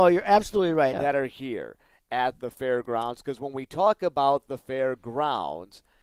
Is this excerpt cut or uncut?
cut